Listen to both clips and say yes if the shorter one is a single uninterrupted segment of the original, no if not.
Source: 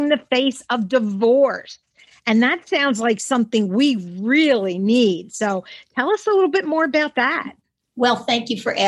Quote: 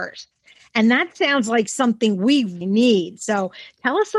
no